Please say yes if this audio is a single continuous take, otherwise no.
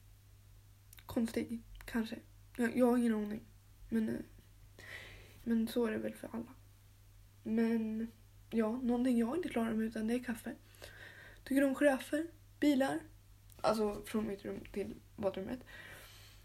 no